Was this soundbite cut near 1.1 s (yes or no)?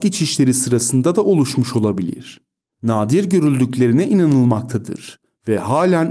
no